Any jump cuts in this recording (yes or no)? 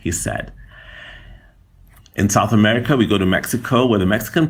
no